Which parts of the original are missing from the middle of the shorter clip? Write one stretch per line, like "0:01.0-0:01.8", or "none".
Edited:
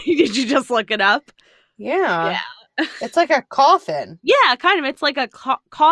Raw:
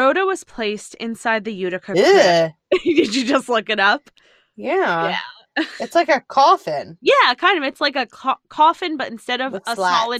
none